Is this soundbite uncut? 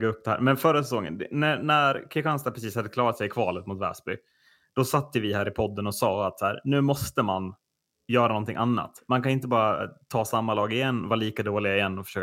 yes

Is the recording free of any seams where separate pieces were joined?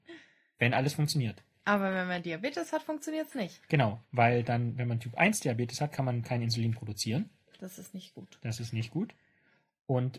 yes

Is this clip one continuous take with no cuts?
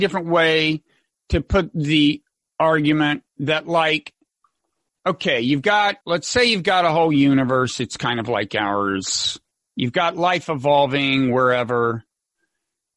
no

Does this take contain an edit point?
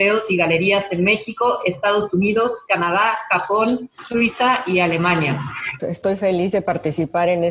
yes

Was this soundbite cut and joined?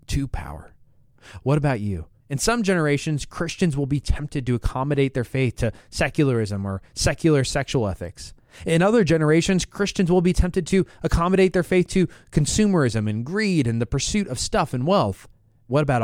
yes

